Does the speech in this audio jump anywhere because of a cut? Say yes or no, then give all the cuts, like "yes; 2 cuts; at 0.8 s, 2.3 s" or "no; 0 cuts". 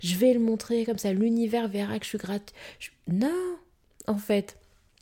no; 0 cuts